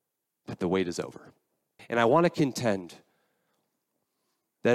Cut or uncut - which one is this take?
cut